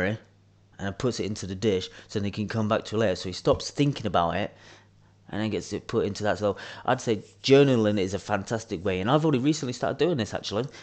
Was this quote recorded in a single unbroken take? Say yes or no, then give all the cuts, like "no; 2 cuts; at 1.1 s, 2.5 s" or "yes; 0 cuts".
yes; 0 cuts